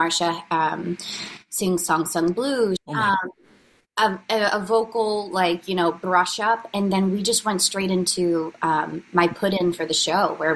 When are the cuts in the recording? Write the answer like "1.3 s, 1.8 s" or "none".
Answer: 2.8 s